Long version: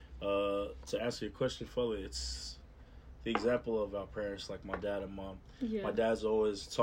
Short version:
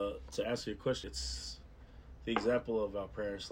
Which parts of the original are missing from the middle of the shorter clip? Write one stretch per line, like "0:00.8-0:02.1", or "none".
0:01.6-0:02.0

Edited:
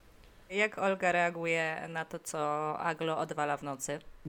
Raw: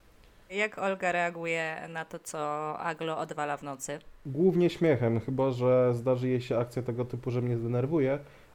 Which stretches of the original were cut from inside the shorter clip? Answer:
none

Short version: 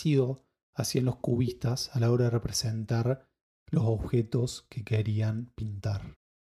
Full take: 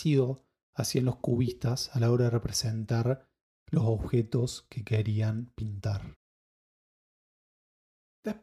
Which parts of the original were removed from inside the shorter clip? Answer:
none

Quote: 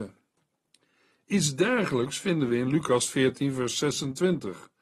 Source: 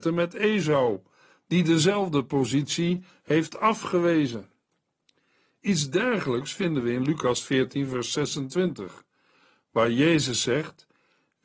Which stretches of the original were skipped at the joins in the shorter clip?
none

